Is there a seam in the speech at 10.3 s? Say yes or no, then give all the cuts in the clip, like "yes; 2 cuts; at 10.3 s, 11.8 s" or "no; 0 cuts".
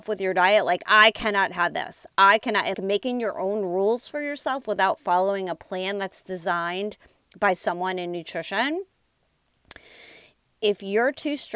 no; 1 cut; at 2.7 s